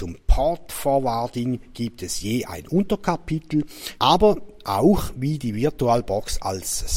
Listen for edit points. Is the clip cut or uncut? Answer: cut